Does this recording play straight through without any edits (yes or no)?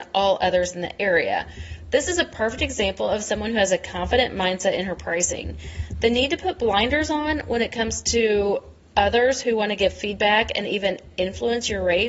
yes